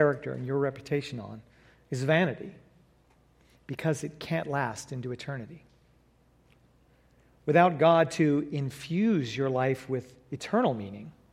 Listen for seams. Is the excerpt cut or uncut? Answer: uncut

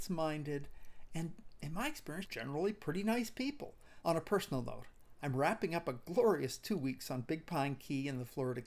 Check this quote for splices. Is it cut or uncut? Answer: cut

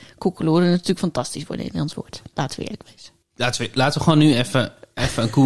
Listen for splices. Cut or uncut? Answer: uncut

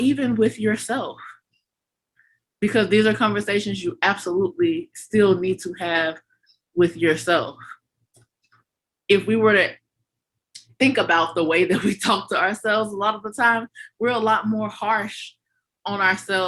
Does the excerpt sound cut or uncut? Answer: uncut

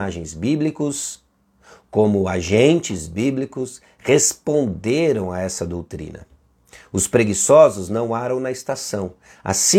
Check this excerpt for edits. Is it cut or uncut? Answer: uncut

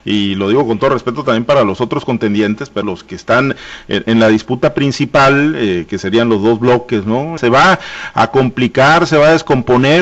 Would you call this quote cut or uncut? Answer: cut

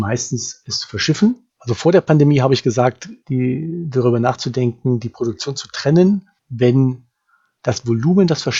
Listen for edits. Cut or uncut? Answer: cut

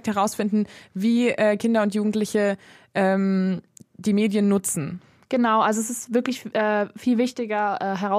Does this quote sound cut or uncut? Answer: uncut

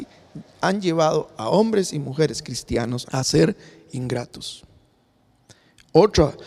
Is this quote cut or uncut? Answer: cut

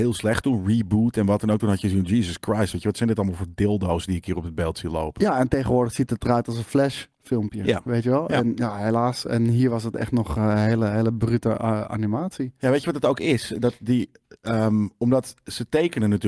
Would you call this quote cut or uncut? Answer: uncut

